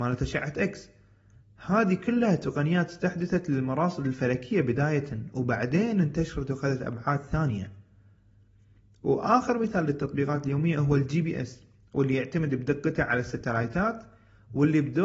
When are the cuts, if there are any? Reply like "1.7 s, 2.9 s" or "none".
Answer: none